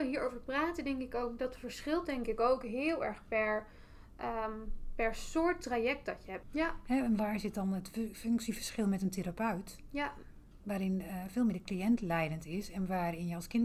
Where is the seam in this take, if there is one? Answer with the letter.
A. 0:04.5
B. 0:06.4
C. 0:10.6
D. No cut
B